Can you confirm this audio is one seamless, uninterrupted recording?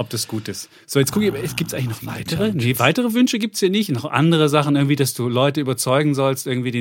yes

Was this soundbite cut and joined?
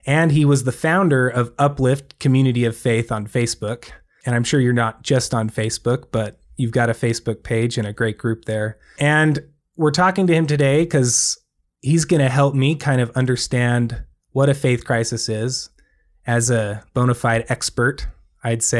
no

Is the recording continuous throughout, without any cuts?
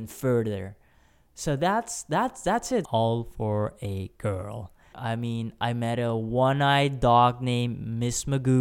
no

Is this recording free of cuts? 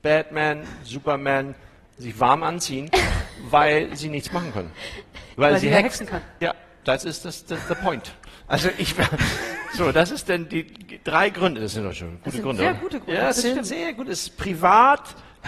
yes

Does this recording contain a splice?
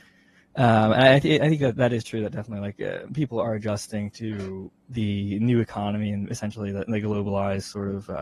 no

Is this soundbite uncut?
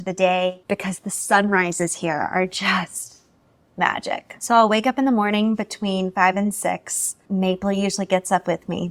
yes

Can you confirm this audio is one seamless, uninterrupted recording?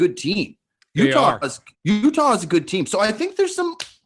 no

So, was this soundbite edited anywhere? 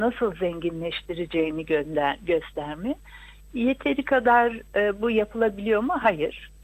no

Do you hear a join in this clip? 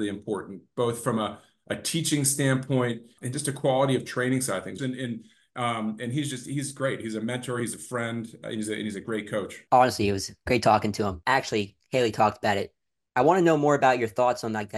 yes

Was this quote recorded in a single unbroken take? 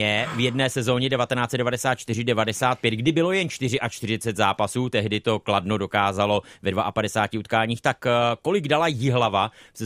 yes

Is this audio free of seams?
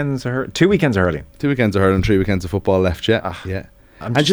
yes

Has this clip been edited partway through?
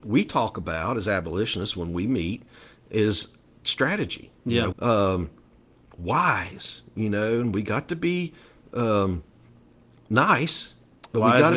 yes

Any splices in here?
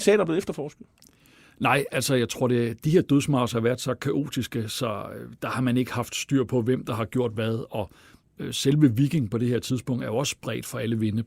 no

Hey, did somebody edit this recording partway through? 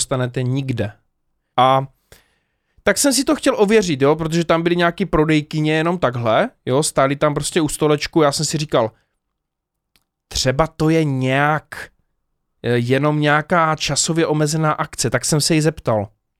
yes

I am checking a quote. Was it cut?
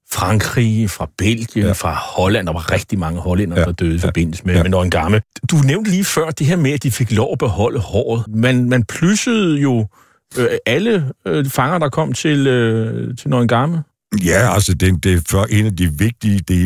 no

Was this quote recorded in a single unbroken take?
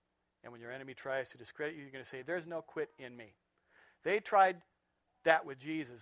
yes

